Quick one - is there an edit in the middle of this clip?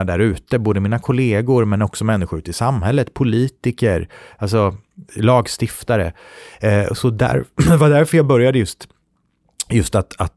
no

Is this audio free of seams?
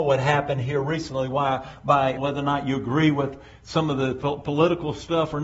no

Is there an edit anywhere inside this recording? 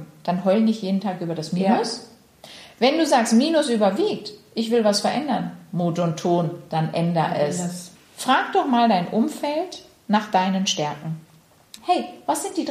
yes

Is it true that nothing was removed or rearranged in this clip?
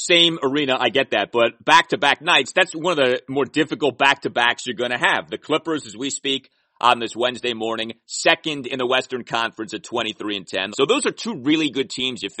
no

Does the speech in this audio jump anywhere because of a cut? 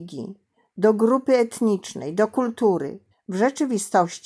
yes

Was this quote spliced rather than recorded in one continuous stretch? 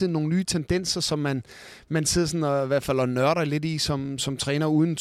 no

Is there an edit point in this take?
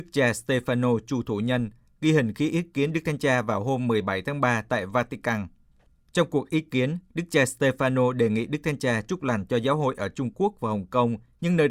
no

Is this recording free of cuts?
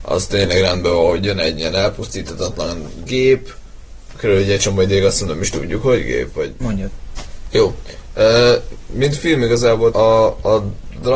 no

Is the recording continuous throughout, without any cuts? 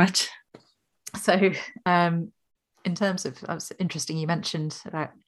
yes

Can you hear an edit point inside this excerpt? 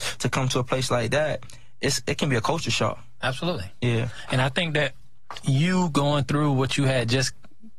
no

